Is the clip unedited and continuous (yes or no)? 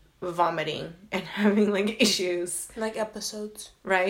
yes